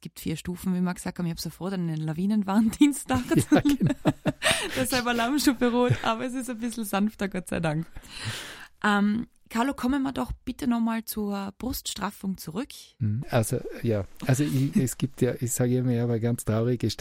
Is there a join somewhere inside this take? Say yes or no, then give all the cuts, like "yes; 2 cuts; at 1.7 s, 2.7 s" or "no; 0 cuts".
yes; 2 cuts; at 13.2 s, 14.7 s